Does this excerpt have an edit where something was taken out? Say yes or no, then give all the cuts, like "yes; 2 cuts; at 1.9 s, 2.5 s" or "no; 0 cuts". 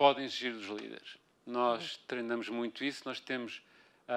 yes; 1 cut; at 1.3 s